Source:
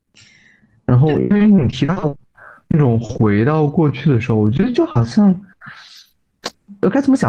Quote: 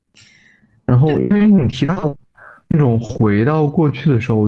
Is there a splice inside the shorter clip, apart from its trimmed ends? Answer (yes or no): no